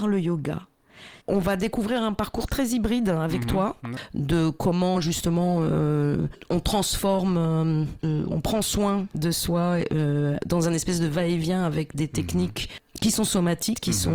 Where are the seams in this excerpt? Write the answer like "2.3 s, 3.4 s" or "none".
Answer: 1.2 s